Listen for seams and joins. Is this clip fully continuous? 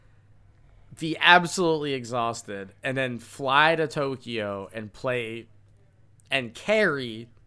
yes; 0 cuts

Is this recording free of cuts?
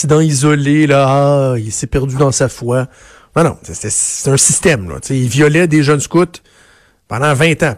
yes; 0 cuts

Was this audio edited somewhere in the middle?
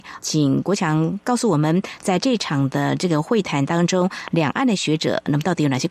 no; 0 cuts

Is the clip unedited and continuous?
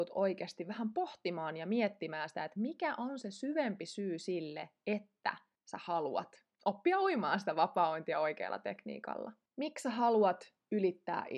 yes; 0 cuts

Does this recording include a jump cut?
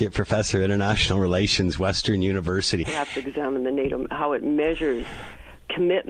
yes; 1 cut; at 2.8 s

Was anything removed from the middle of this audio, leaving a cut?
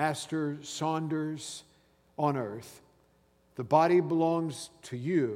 yes; 1 cut; at 3.5 s

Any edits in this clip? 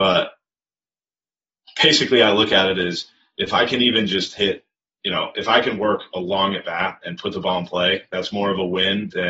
no; 0 cuts

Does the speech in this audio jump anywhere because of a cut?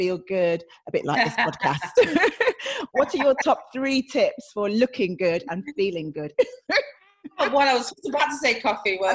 yes; 1 cut; at 6.3 s

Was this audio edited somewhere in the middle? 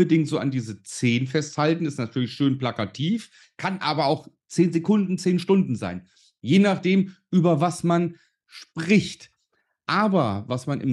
yes; 2 cuts; at 3.4 s, 5.2 s

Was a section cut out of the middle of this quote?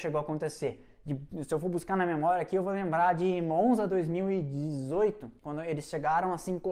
no; 0 cuts

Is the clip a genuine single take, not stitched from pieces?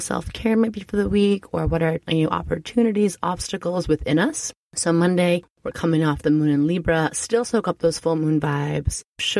yes; 0 cuts

